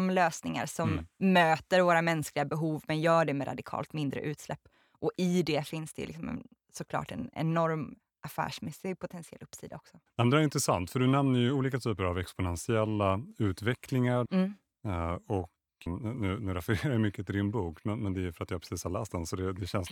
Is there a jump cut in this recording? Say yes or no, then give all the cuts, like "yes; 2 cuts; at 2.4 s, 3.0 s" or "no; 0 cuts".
yes; 3 cuts; at 10.1 s, 14.3 s, 15.9 s